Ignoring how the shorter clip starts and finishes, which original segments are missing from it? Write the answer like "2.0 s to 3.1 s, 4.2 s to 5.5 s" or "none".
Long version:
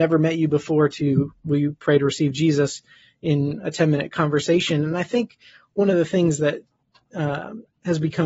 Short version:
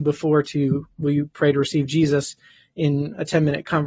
none